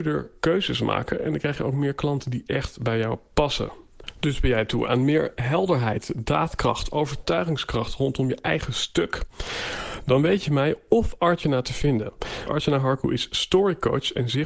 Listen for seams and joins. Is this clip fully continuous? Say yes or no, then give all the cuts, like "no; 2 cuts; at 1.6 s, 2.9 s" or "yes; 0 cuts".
no; 1 cut; at 12.5 s